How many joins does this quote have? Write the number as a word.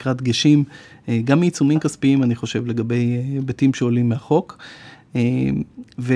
zero